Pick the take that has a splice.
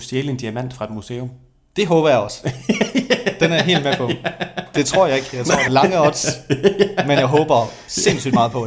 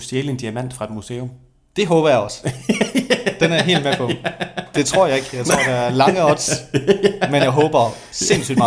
first; 1 cut; at 5.7 s

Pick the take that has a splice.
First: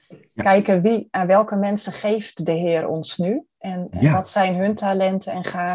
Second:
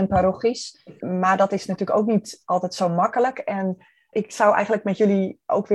second; 2 cuts; at 1.0 s, 4.1 s

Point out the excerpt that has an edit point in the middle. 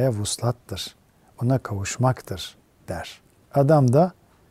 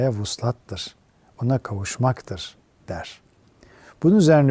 first; 1 cut; at 3.5 s

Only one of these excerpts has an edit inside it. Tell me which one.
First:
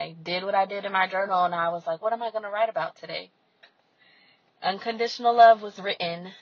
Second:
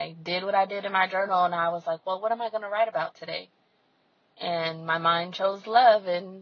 first; 2 cuts; at 2.0 s, 3.6 s

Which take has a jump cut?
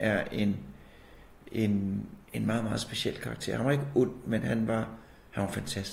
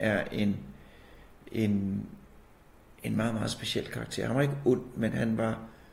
first; 1 cut; at 2.2 s

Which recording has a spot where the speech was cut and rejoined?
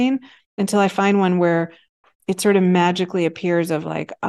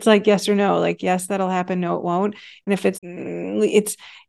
second; 1 cut; at 2.9 s

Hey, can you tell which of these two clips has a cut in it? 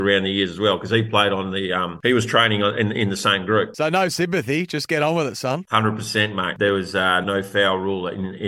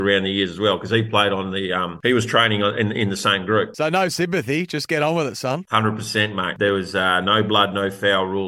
first; 1 cut; at 7.2 s

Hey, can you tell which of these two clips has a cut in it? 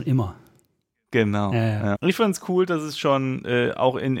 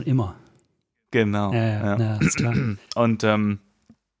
first; 1 cut; at 2.0 s

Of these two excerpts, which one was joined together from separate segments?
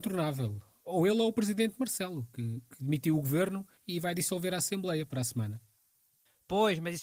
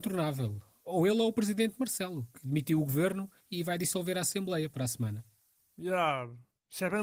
second; 2 cuts; at 2.3 s, 5.6 s

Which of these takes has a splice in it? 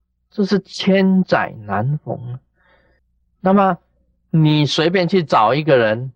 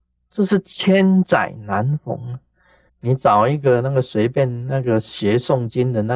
second; 1 cut; at 2.9 s

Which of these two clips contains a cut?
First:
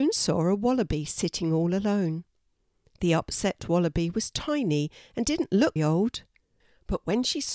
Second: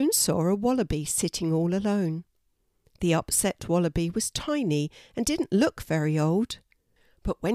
first; 1 cut; at 5.8 s

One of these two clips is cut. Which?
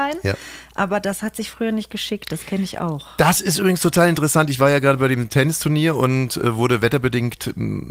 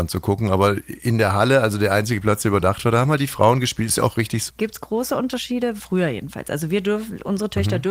second; 2 cuts; at 4.5 s, 5.8 s

